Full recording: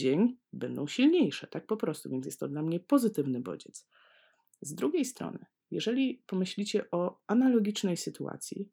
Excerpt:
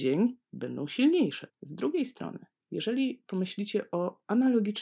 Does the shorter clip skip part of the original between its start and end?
yes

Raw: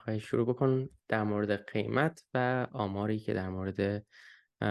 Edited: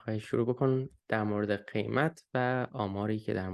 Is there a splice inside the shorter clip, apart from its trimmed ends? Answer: no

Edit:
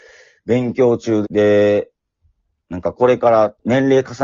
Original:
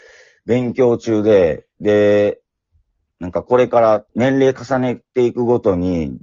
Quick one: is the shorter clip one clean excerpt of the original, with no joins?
no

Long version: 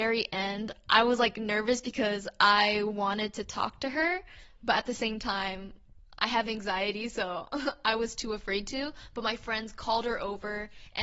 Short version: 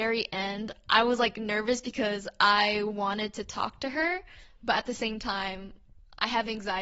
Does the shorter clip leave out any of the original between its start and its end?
no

